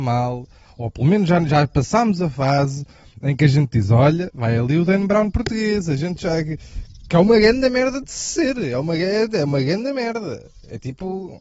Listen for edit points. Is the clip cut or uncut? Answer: uncut